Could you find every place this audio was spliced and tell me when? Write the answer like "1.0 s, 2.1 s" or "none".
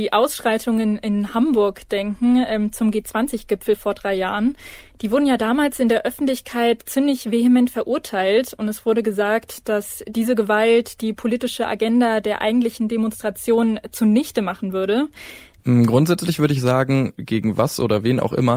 15.6 s, 17.2 s